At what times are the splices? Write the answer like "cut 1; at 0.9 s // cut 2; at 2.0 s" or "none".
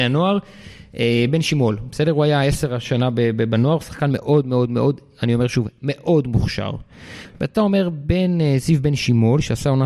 none